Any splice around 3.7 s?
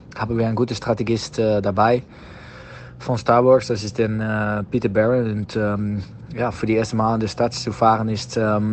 no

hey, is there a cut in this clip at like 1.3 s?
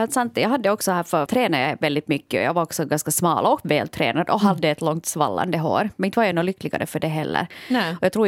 yes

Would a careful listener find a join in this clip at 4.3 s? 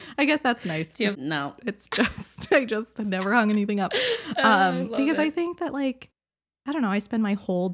no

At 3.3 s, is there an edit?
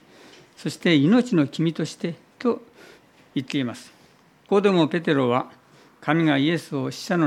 no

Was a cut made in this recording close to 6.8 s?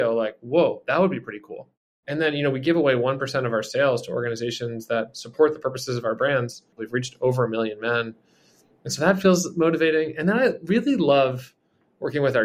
yes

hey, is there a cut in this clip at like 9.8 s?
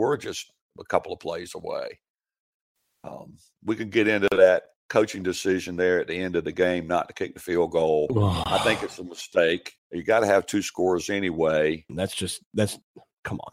yes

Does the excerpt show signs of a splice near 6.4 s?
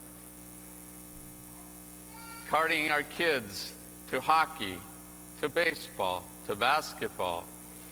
no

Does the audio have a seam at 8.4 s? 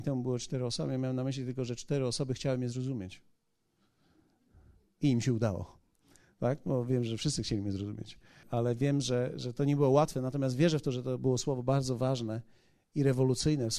yes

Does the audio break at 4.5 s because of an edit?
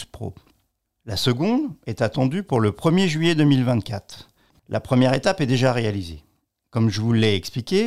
yes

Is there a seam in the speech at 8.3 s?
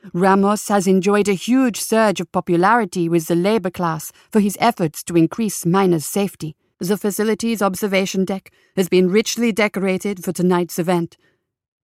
no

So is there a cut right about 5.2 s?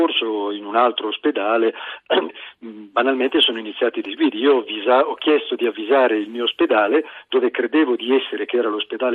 no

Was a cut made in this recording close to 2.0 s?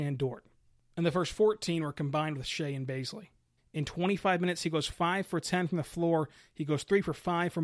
no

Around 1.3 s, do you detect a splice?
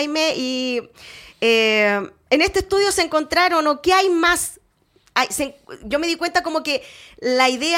no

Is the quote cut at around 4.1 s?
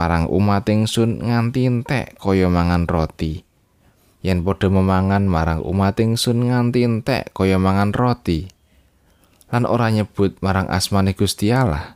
yes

